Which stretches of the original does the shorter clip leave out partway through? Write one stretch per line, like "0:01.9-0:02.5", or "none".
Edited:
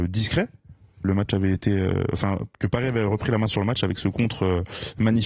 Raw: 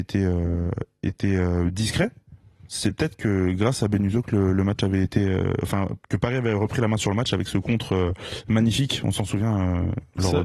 0:02.7-0:04.5